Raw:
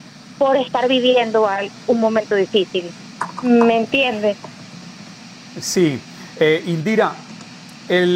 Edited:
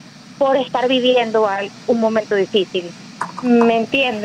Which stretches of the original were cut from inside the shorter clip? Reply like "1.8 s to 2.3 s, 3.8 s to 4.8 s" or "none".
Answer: none